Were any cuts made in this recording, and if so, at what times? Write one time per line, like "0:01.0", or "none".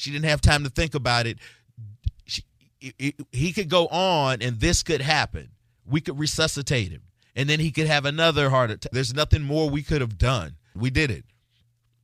0:08.9
0:10.8